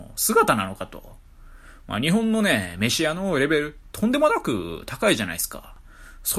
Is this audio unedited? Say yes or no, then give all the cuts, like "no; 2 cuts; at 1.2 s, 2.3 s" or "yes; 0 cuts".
no; 1 cut; at 1.7 s